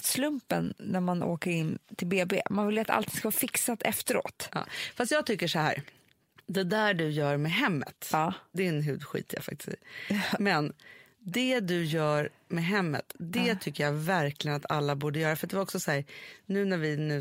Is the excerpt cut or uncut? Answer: uncut